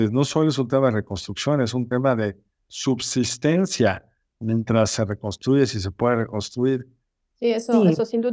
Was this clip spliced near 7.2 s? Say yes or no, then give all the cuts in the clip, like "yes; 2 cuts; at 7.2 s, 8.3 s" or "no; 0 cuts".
yes; 1 cut; at 7.2 s